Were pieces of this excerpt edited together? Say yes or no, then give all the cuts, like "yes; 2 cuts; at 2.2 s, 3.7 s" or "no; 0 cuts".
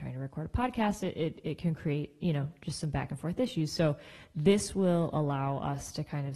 no; 0 cuts